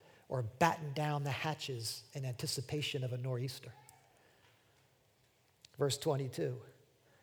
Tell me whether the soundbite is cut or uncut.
uncut